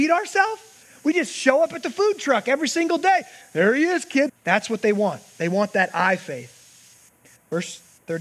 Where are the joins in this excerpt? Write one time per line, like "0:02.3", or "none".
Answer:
0:04.3